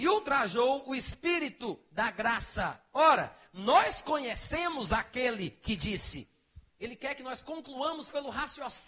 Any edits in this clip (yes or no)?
yes